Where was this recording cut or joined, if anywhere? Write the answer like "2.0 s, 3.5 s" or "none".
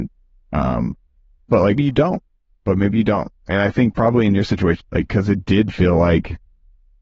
1.8 s, 4.8 s